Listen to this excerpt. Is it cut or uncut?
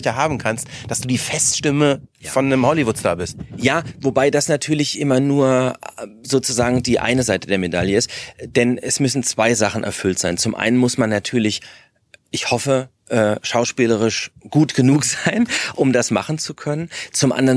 uncut